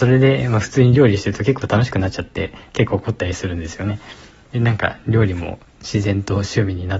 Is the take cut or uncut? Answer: uncut